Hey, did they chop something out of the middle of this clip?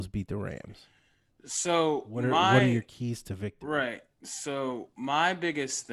no; 0 cuts

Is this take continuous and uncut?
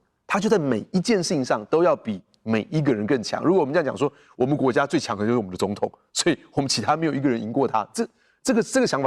yes; 0 cuts

